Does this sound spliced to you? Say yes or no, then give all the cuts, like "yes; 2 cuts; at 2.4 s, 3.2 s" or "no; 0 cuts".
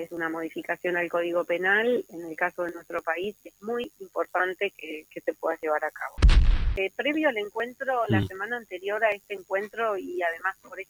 no; 0 cuts